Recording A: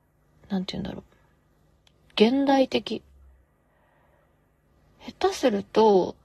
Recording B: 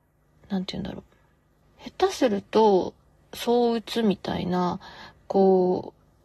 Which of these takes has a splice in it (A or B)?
B